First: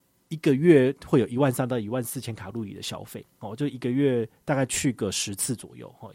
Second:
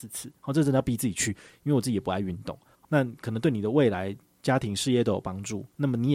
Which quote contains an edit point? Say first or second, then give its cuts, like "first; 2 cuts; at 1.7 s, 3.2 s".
second; 1 cut; at 2.7 s